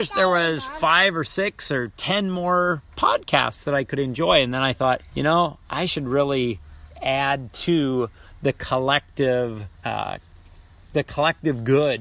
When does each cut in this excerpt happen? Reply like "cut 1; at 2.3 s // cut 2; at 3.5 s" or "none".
cut 1; at 5.1 s // cut 2; at 9.7 s